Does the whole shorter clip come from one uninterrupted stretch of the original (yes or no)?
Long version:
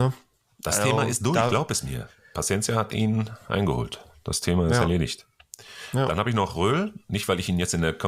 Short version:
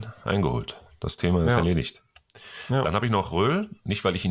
yes